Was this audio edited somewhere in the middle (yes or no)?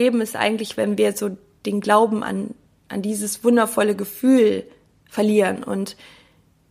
no